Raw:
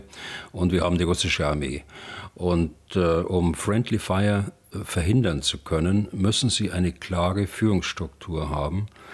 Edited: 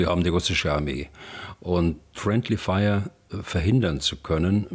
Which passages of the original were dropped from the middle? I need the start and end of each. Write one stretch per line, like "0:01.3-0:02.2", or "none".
0:02.9-0:03.6